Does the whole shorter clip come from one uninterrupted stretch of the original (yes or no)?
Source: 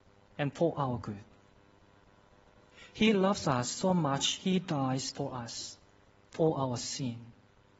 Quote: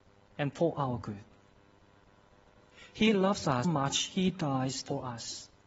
no